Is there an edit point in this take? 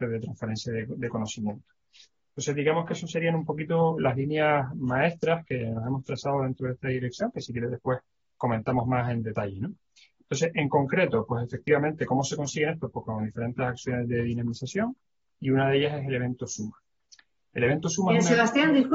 no; 0 cuts

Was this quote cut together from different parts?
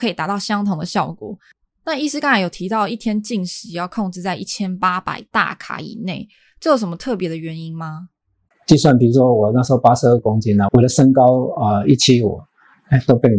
yes; 2 cuts; at 8.5 s, 10.7 s

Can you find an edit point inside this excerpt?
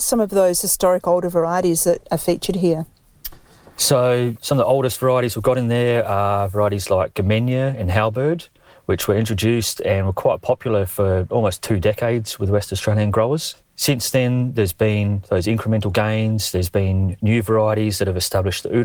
no; 0 cuts

